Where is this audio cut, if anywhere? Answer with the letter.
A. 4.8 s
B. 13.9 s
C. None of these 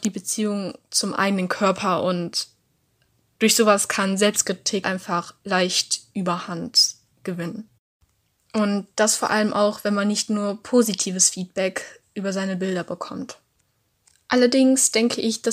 A